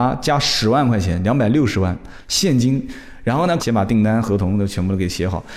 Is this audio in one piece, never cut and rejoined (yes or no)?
no